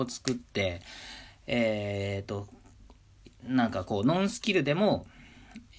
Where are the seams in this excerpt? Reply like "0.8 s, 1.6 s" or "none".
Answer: none